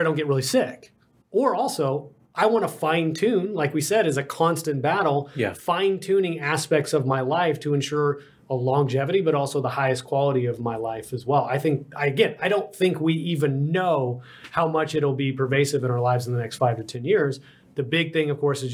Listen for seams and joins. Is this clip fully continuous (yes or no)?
yes